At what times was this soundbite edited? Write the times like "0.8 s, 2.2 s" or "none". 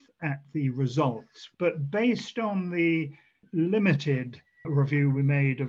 1.5 s